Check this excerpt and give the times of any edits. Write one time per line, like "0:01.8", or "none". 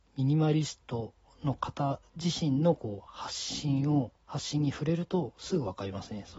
0:04.2